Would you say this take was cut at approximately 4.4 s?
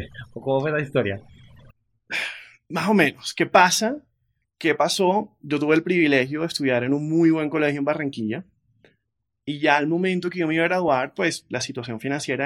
yes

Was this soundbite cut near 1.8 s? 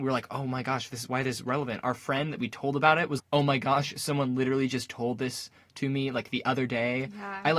no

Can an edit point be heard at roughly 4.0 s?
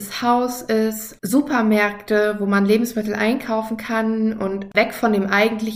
no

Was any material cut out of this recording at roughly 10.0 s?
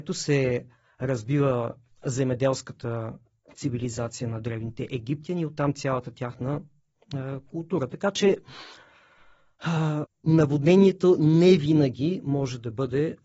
yes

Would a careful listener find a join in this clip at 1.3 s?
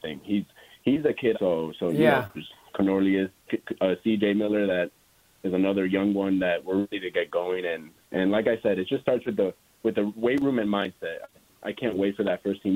yes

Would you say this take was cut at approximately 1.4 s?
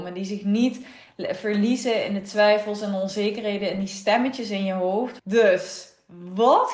no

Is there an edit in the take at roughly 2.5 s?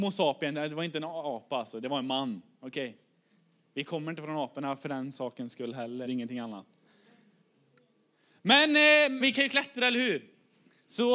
no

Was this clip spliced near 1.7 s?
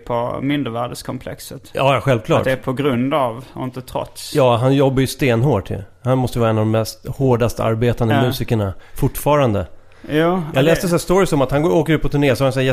no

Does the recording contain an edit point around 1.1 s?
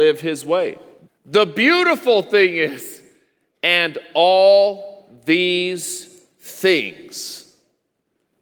yes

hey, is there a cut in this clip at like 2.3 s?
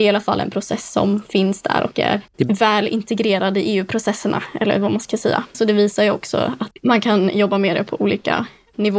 yes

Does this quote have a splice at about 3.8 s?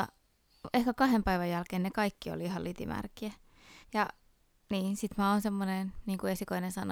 yes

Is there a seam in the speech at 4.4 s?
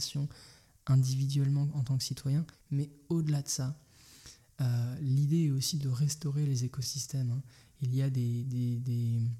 no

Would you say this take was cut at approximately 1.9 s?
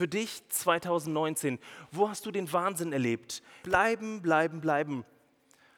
no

